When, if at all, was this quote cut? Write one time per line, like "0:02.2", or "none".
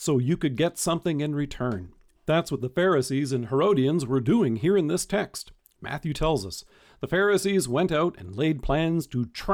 0:05.7